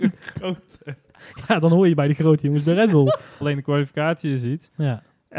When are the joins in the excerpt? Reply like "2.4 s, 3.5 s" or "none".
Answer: 3.4 s

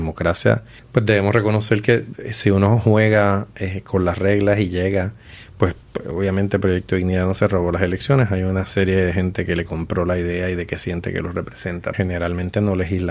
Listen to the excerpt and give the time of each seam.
11.9 s

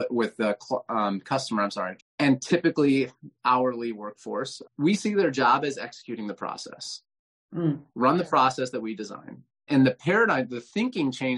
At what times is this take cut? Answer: 2.0 s, 4.6 s, 9.7 s

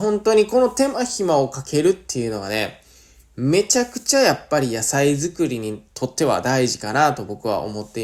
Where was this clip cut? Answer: none

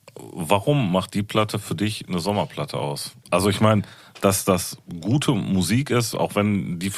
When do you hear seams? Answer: none

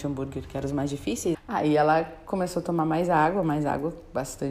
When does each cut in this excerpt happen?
1.3 s

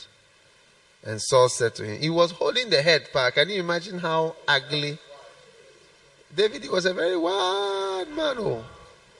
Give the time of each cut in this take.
none

